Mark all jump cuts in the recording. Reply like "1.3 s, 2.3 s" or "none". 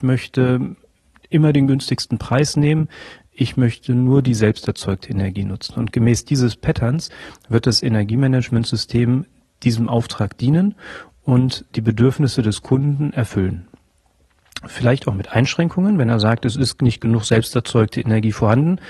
none